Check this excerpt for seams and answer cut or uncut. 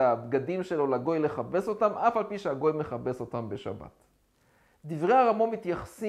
uncut